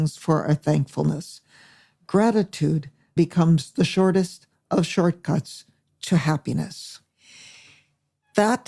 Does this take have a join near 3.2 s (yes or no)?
yes